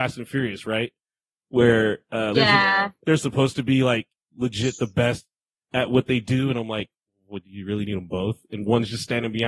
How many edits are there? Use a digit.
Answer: 1